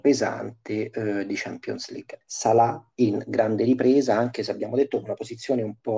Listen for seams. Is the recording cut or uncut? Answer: cut